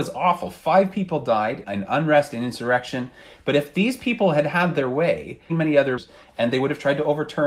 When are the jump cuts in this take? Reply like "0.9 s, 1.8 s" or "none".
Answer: 1.6 s, 5.5 s